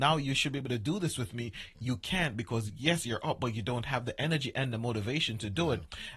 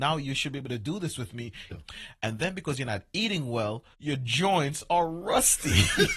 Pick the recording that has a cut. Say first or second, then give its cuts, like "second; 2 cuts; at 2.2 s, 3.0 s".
second; 2 cuts; at 1.7 s, 3.9 s